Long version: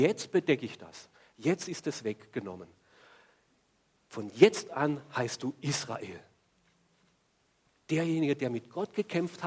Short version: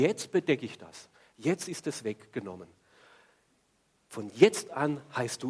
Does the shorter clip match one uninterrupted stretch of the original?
yes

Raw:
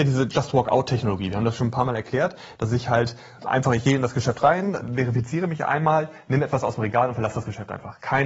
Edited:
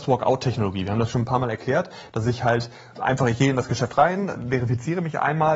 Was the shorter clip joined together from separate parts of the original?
no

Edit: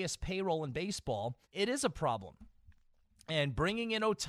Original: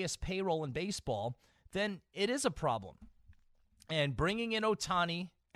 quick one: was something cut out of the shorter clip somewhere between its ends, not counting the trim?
yes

